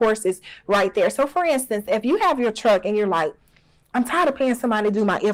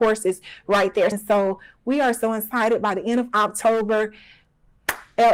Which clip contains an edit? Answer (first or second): second